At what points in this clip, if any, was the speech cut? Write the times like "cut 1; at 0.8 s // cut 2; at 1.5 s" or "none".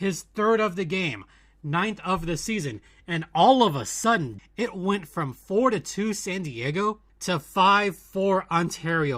cut 1; at 4.4 s // cut 2; at 7.1 s